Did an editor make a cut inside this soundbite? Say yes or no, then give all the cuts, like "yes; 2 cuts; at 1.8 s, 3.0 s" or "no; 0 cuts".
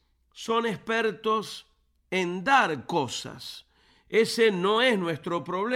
no; 0 cuts